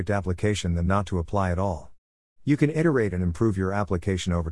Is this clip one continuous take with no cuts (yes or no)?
yes